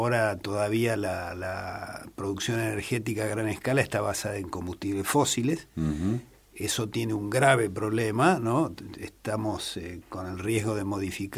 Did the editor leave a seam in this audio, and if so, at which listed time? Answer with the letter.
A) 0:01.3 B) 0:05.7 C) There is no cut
C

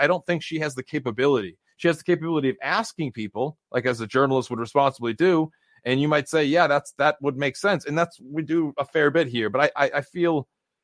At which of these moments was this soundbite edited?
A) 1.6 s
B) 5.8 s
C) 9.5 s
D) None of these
D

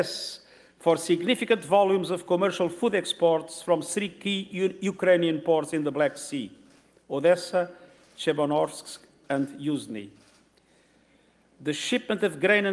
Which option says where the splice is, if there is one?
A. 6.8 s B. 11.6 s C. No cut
C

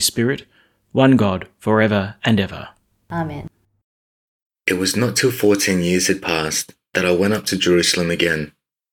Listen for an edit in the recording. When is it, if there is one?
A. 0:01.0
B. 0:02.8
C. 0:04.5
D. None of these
C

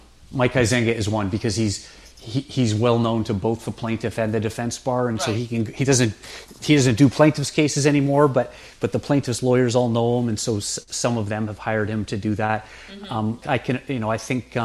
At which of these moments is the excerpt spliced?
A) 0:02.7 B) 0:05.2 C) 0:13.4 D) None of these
C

